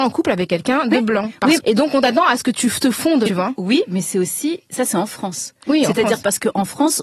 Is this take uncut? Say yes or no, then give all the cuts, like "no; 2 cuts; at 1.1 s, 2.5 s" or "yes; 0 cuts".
no; 2 cuts; at 1.6 s, 3.3 s